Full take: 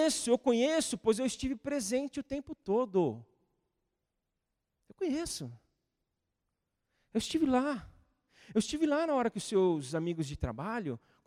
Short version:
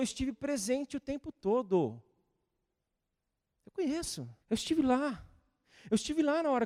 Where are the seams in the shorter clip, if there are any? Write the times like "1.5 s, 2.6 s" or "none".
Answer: 4.4 s